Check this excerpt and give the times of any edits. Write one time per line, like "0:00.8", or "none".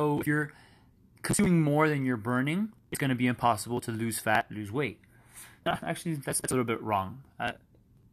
0:05.6